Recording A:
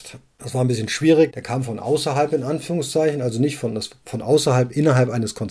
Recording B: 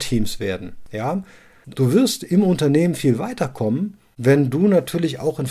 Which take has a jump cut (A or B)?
B